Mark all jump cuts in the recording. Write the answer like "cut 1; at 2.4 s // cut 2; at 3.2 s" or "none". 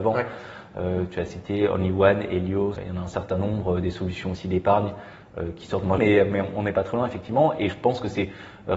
cut 1; at 2.8 s // cut 2; at 6.0 s

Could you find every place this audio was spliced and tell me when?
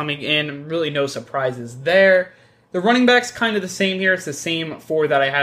none

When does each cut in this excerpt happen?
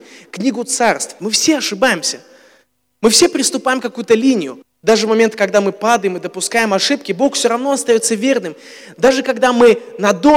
cut 1; at 1.2 s // cut 2; at 4.6 s

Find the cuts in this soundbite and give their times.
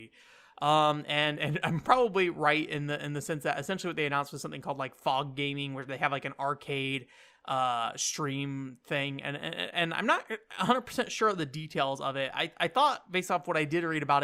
none

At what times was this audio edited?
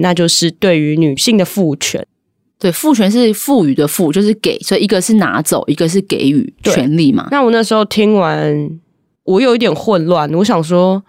none

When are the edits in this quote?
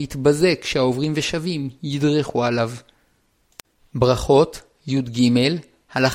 none

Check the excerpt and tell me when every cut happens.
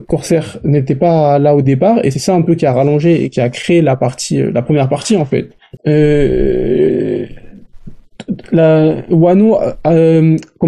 cut 1; at 5.8 s

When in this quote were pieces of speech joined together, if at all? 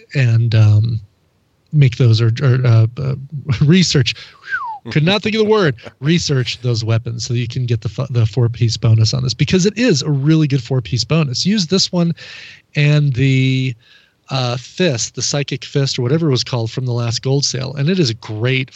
none

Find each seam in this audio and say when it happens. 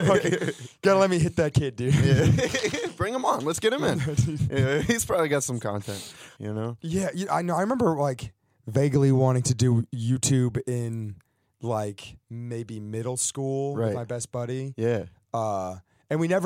cut 1; at 6.4 s

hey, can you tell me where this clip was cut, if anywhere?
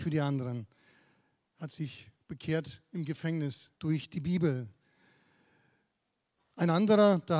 cut 1; at 1.5 s // cut 2; at 3.8 s

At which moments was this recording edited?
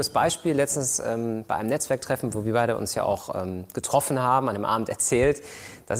none

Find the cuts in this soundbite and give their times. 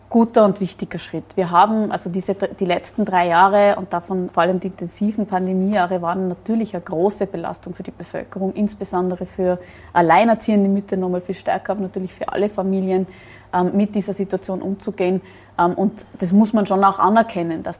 cut 1; at 4.3 s

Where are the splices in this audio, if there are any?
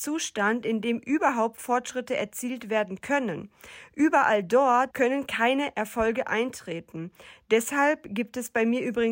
cut 1; at 4.9 s

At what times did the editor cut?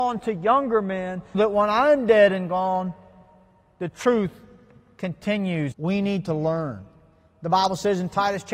cut 1; at 1.3 s // cut 2; at 5.7 s

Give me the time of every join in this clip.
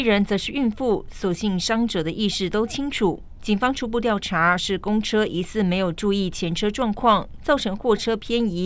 cut 1; at 3.4 s // cut 2; at 7.4 s

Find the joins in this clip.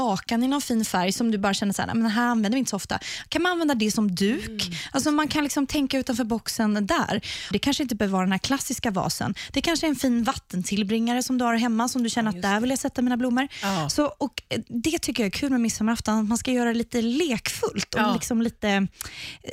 cut 1; at 7.5 s

